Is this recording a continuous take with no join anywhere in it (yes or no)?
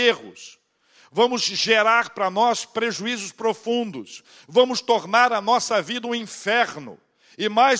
yes